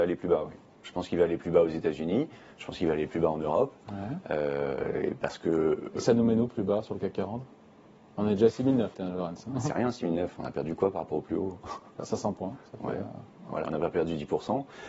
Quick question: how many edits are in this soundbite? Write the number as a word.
two